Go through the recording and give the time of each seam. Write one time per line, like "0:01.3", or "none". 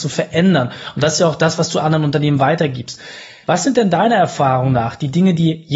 0:03.4